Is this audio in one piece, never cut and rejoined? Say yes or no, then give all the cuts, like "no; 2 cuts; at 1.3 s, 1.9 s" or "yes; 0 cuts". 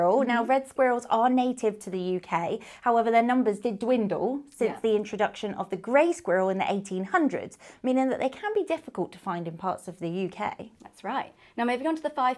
yes; 0 cuts